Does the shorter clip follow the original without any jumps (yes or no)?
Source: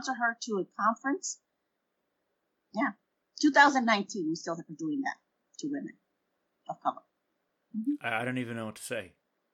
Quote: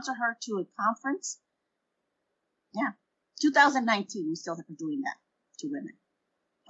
yes